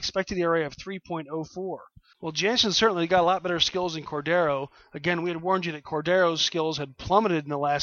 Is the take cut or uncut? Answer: cut